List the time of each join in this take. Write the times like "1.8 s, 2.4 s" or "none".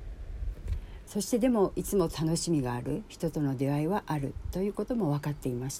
1.1 s